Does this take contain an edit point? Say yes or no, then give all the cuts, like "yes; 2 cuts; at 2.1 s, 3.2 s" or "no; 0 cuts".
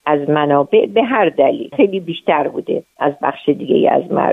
yes; 1 cut; at 1.7 s